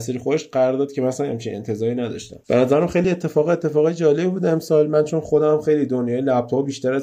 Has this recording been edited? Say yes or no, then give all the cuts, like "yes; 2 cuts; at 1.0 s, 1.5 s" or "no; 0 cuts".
no; 0 cuts